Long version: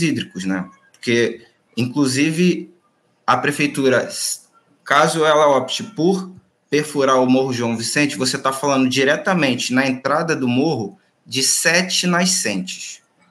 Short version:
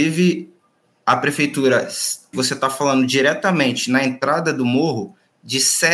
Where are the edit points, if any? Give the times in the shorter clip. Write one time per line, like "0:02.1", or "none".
0:02.3